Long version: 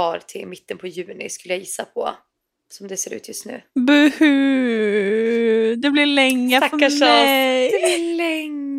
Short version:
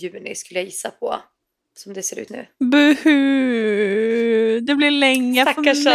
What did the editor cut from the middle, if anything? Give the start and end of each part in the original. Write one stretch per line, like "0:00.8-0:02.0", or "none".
0:03.2-0:03.4